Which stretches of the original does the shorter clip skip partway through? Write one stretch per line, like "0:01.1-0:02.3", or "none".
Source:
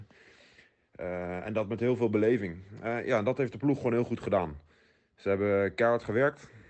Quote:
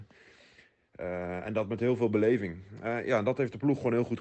none